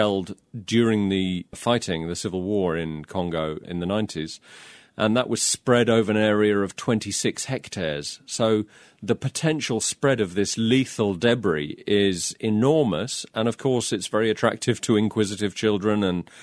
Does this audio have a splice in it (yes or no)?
no